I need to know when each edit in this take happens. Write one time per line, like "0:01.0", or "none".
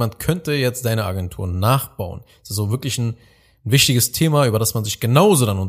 none